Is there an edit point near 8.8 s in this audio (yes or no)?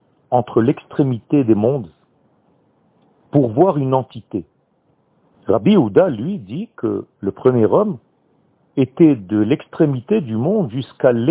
no